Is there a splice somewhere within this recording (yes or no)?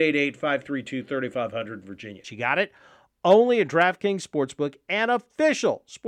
yes